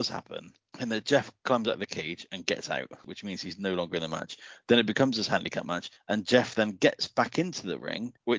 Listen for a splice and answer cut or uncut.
uncut